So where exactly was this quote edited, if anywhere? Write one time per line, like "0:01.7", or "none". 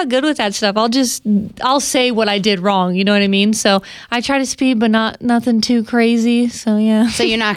none

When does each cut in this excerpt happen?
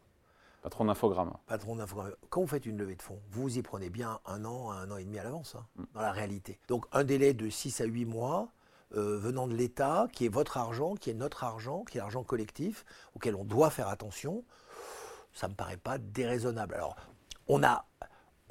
0:06.6

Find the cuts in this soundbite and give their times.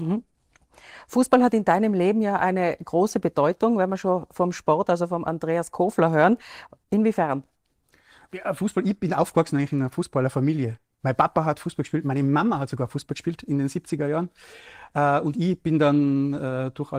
none

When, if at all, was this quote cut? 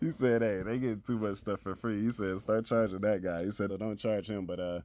0:03.7

